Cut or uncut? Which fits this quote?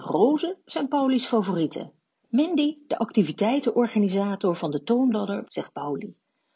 cut